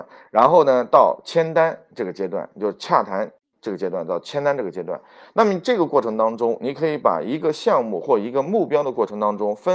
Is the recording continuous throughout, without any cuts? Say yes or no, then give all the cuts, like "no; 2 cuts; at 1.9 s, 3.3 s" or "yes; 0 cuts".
yes; 0 cuts